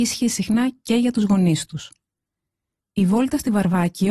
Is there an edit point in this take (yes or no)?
no